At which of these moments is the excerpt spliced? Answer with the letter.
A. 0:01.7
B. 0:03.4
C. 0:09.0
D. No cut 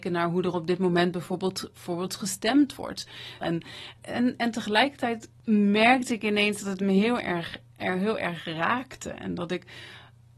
B